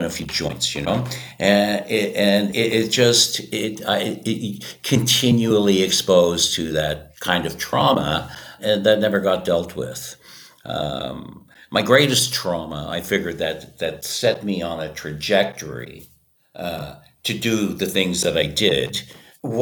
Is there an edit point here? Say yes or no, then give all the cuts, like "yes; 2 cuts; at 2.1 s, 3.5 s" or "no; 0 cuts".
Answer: no; 0 cuts